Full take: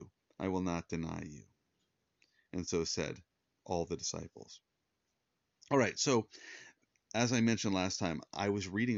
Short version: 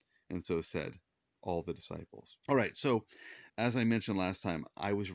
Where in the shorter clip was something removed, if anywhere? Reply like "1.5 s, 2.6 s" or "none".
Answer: 2.4 s, 3.5 s